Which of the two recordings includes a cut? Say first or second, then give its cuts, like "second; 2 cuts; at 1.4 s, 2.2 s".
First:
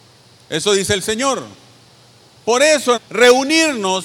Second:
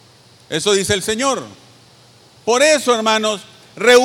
first; 1 cut; at 3.0 s